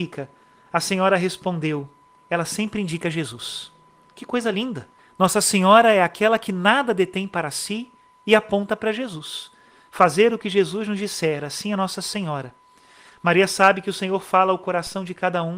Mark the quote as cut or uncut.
uncut